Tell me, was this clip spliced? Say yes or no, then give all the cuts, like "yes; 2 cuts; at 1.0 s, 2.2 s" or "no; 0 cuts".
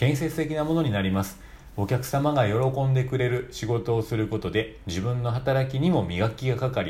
no; 0 cuts